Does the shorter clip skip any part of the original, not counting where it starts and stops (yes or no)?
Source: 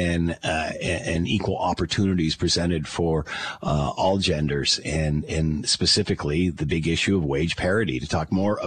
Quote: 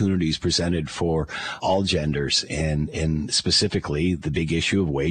yes